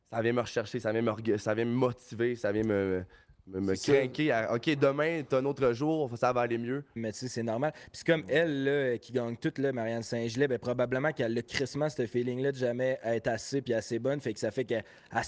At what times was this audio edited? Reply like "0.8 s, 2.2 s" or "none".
7.0 s